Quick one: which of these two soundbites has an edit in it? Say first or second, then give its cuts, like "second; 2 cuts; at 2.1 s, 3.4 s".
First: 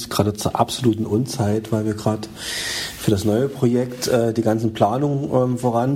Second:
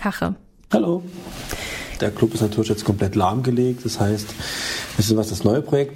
second; 1 cut; at 2.0 s